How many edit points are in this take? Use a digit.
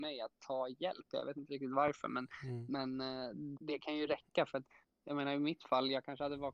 1